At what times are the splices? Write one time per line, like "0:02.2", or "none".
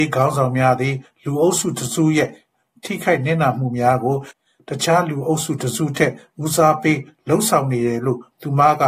none

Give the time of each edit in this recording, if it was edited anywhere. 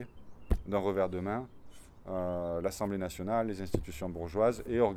none

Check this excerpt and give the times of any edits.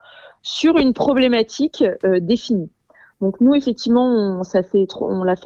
none

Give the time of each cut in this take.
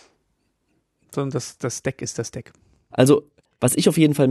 0:02.9

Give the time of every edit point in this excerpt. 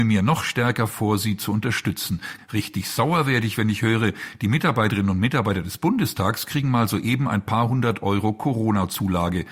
0:02.4

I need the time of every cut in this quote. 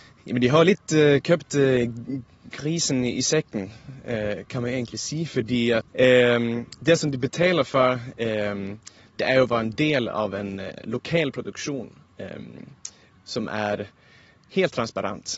0:05.9

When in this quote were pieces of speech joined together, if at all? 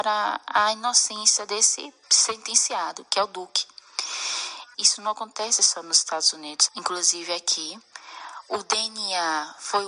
0:02.0
0:04.7
0:06.7

